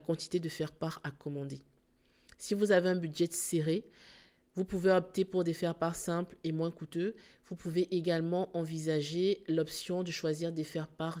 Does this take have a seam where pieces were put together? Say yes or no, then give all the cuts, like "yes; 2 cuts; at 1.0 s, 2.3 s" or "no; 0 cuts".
no; 0 cuts